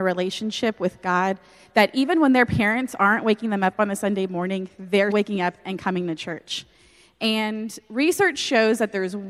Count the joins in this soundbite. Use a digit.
1